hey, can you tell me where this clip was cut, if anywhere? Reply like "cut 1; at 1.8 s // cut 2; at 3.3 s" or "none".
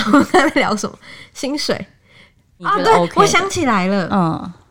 none